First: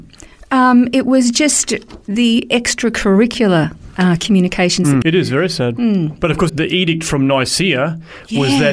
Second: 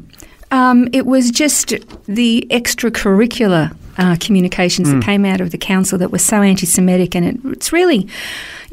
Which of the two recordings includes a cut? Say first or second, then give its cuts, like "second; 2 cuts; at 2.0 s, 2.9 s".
first; 2 cuts; at 5.0 s, 6.5 s